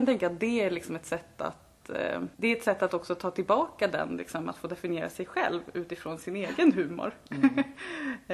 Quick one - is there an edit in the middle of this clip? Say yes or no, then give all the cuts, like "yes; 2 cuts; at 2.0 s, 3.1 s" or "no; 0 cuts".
yes; 1 cut; at 2.3 s